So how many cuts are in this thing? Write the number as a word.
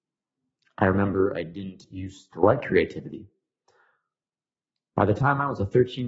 zero